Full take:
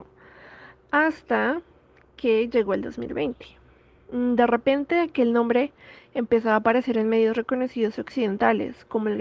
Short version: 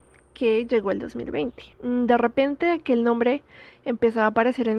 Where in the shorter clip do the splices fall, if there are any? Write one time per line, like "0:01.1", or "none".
0:01.7